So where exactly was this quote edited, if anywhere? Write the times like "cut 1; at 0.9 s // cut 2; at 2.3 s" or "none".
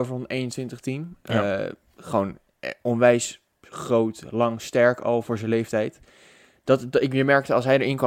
none